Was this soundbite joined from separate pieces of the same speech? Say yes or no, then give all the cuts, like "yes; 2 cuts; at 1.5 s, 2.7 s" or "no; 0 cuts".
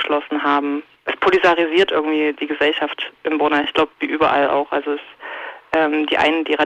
no; 0 cuts